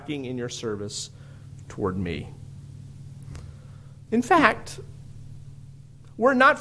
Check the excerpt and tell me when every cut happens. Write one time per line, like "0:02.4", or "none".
0:04.1